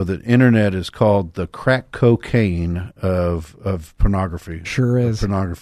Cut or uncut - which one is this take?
uncut